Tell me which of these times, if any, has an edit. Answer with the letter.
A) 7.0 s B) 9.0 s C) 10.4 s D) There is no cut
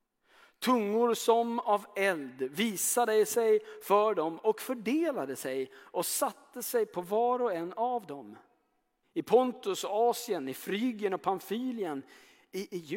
B